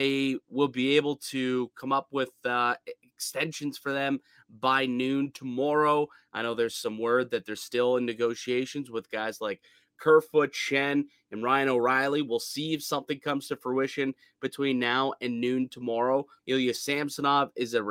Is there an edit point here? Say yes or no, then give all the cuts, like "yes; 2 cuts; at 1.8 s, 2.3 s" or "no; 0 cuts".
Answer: yes; 1 cut; at 16.4 s